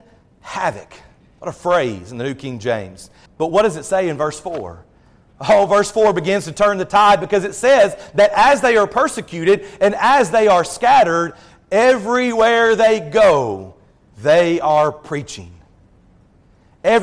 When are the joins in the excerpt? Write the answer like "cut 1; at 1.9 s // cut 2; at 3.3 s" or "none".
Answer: cut 1; at 3.3 s